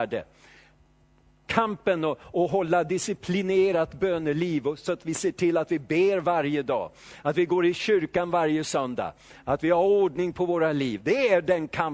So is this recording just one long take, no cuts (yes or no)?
yes